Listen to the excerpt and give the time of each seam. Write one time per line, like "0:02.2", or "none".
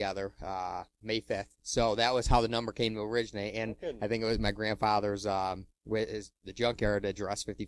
none